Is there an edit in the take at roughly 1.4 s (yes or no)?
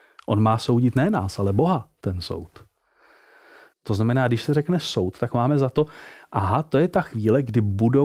no